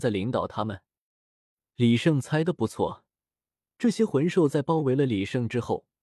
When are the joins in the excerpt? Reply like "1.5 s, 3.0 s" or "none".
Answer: none